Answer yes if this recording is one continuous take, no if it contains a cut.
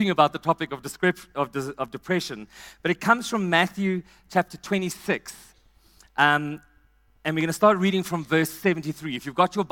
yes